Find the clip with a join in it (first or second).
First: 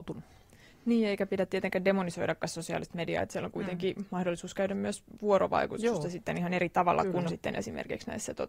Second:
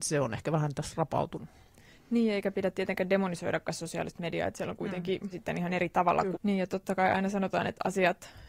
second